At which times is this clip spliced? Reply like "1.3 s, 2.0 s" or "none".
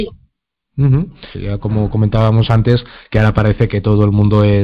1.3 s, 3.7 s